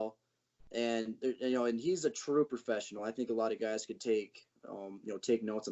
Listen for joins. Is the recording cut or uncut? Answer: uncut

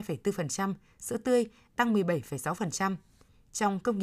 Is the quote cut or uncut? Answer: uncut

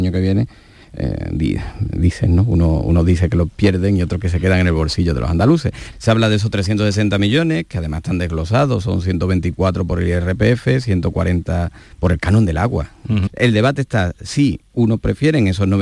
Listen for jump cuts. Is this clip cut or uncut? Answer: cut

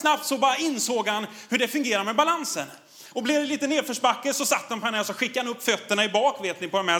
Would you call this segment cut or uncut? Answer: uncut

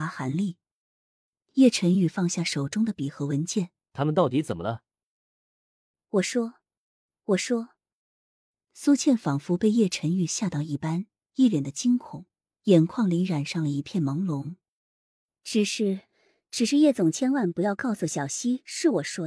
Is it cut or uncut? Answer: cut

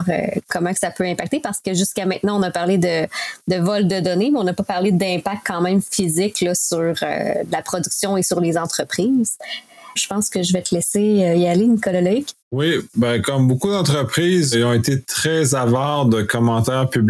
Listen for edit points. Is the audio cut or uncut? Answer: cut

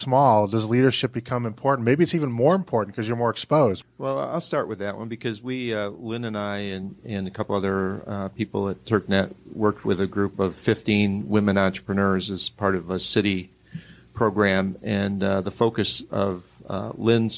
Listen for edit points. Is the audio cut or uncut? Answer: cut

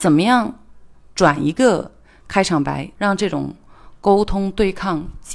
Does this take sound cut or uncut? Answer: cut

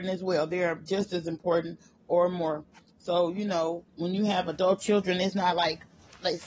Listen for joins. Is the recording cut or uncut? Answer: cut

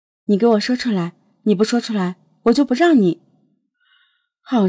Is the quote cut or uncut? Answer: uncut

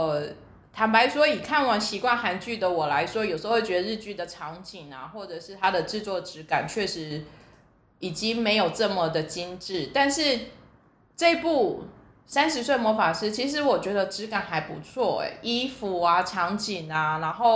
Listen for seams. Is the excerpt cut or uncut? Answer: uncut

